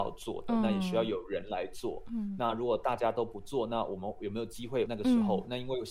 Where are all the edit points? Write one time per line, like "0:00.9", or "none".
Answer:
0:04.9